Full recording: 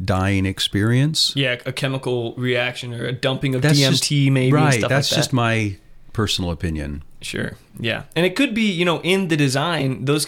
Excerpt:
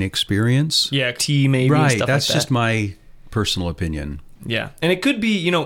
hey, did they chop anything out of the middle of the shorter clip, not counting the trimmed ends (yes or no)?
yes